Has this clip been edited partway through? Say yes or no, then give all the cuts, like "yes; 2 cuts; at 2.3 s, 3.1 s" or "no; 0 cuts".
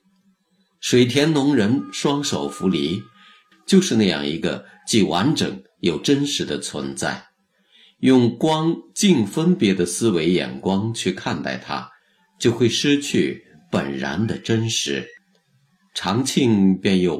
yes; 1 cut; at 3.5 s